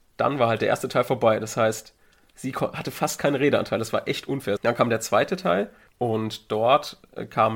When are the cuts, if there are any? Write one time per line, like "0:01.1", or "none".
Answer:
0:04.6